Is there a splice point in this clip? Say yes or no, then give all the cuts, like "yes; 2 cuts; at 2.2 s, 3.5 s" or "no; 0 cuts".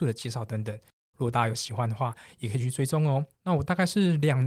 yes; 1 cut; at 3.3 s